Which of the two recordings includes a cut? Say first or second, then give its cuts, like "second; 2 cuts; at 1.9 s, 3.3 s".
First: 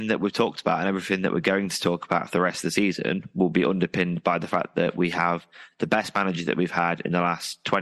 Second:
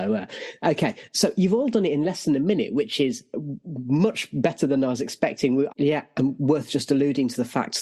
second; 1 cut; at 5.7 s